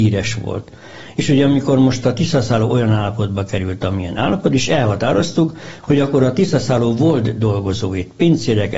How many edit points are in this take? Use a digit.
0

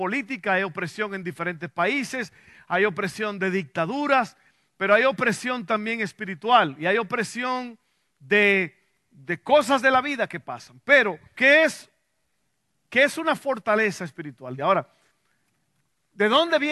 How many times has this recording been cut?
2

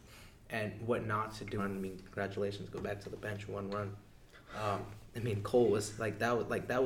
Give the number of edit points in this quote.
1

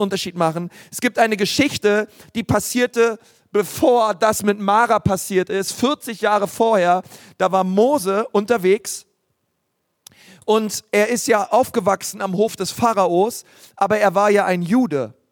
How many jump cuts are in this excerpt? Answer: 0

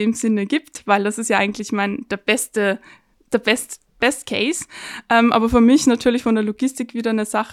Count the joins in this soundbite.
0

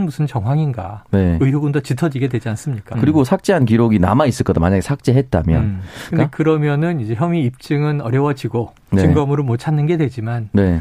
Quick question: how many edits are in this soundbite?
2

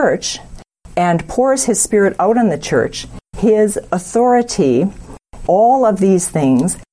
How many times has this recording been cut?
2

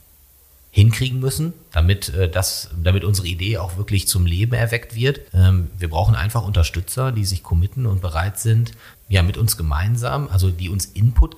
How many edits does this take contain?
2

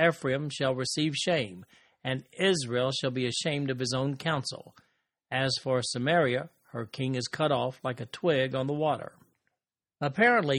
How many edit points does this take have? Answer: 0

